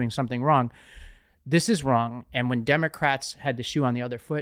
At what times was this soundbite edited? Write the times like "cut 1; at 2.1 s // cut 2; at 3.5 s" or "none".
none